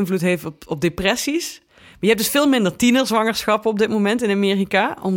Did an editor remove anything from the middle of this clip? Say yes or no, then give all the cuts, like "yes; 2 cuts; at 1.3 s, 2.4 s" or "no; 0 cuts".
no; 0 cuts